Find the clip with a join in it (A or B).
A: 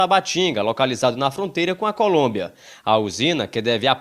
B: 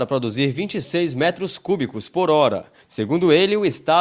B